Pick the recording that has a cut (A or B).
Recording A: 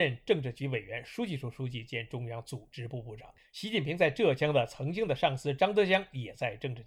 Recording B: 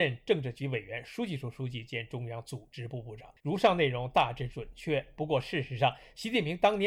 B